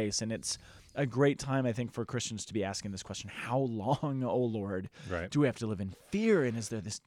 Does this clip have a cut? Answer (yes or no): no